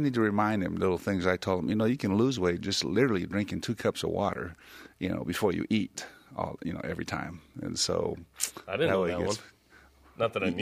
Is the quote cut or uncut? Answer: uncut